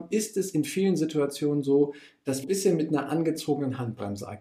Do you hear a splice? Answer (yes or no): yes